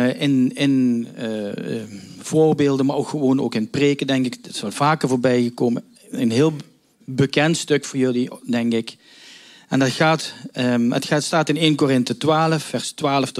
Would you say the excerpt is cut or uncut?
uncut